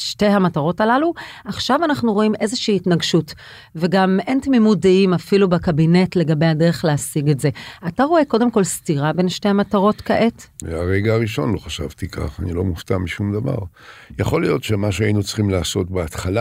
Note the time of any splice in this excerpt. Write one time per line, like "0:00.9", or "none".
0:10.6